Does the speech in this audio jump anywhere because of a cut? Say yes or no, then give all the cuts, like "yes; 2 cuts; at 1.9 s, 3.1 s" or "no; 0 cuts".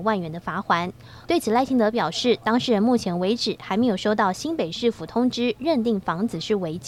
yes; 1 cut; at 1.3 s